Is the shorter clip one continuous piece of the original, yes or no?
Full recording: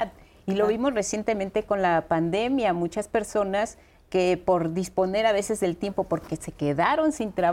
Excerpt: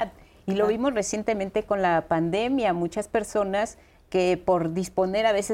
yes